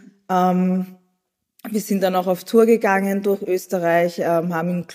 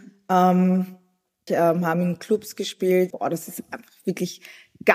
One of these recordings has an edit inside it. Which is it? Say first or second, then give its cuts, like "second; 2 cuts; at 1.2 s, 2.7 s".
second; 2 cuts; at 1.5 s, 3.1 s